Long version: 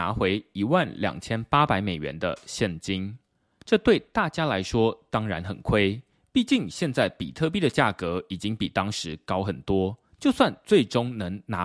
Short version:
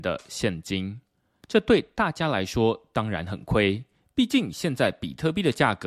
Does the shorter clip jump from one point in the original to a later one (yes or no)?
no